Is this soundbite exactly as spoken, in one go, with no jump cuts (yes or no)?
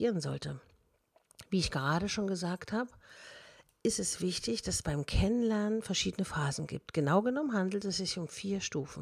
yes